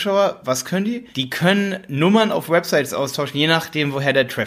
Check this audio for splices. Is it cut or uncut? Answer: cut